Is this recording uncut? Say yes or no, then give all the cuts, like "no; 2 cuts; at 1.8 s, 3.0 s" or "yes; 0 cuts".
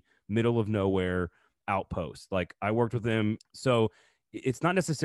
no; 1 cut; at 3.4 s